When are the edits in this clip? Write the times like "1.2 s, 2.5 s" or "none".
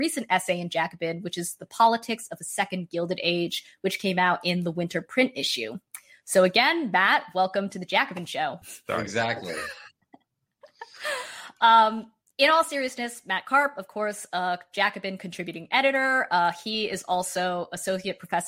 8.6 s